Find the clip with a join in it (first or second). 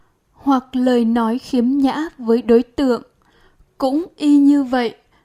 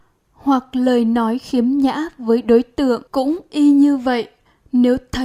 second